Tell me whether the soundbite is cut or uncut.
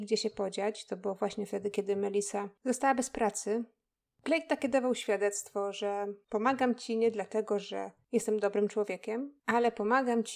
uncut